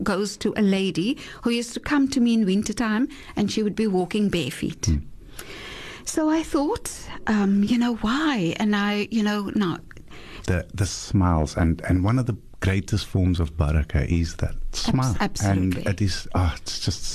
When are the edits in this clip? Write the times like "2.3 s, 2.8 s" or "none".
10.4 s, 15.1 s